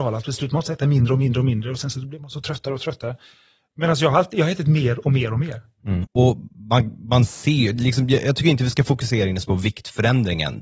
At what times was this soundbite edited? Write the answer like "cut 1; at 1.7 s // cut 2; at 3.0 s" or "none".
cut 1; at 6.0 s